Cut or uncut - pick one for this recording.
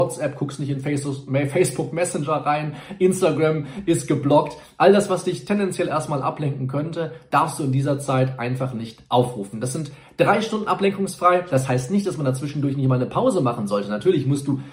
uncut